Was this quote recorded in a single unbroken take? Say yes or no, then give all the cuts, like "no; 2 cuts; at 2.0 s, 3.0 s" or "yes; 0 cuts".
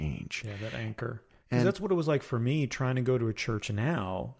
yes; 0 cuts